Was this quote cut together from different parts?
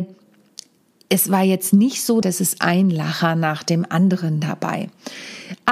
yes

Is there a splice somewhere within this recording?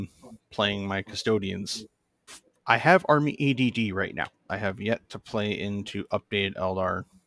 yes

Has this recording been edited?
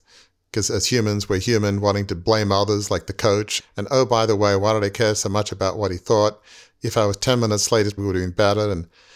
yes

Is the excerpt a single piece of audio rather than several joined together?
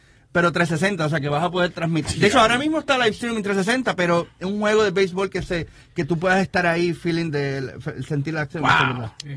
no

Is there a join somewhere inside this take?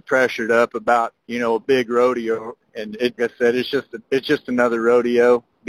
yes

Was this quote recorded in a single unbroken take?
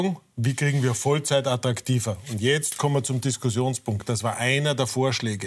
yes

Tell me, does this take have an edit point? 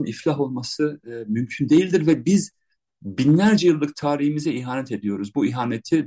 no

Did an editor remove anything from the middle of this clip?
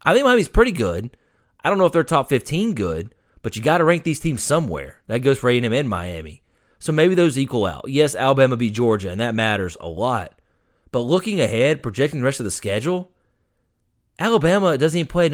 no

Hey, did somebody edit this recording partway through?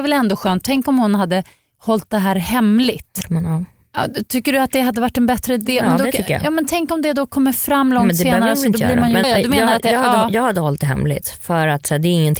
yes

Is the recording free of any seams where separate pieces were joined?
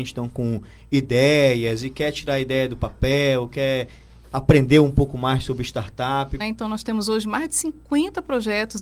no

